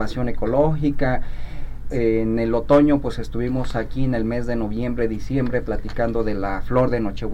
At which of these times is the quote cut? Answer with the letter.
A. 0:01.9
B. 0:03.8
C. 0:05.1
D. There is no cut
A